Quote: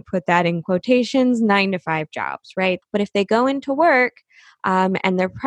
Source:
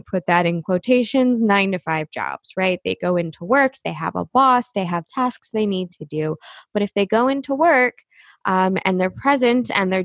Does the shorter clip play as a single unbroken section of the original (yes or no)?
no